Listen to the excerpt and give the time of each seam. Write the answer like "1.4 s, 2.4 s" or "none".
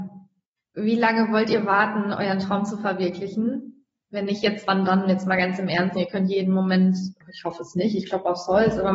6.0 s, 7.2 s